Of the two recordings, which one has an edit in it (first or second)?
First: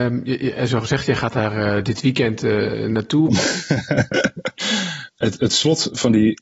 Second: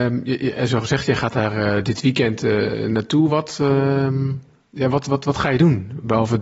first